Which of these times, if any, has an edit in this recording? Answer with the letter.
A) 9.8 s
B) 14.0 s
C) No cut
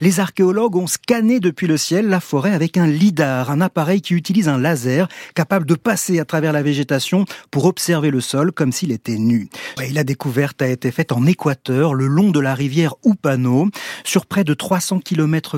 A